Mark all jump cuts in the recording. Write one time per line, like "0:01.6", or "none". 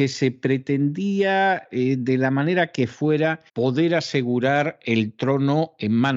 0:03.5